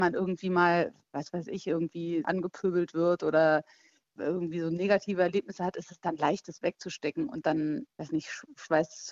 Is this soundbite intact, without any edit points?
yes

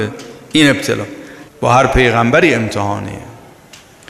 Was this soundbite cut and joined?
yes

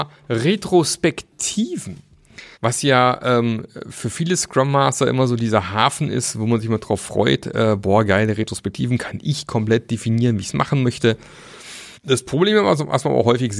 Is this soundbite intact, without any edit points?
no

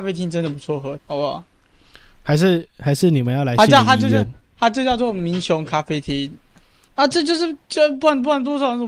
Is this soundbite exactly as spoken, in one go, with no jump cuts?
no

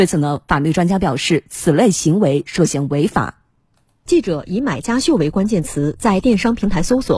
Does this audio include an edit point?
no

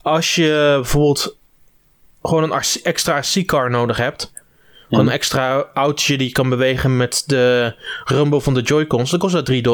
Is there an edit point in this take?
no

